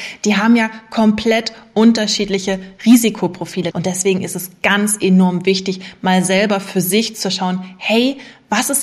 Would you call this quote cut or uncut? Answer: cut